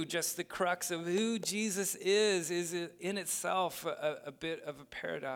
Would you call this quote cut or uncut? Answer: uncut